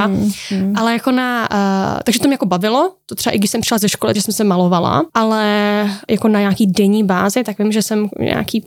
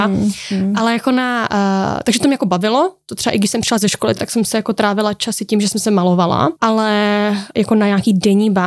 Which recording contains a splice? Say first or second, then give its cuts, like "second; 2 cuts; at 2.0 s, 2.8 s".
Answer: first; 1 cut; at 4.1 s